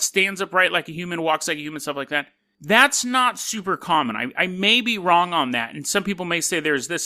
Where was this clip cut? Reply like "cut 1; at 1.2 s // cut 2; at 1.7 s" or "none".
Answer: none